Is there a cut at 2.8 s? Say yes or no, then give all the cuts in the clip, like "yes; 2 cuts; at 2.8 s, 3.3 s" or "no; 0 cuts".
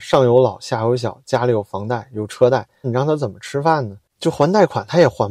yes; 1 cut; at 2.8 s